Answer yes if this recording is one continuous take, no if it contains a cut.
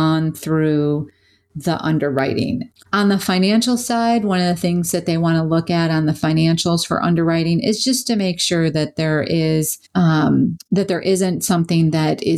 no